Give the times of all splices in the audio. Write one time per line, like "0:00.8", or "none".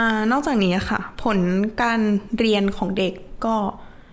none